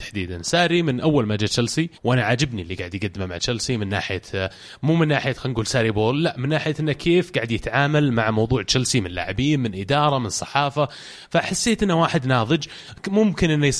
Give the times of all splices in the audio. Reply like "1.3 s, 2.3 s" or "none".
2.0 s